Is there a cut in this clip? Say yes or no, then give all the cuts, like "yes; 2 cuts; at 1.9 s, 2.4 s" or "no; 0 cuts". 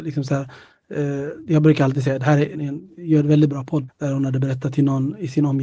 yes; 2 cuts; at 2.5 s, 3.9 s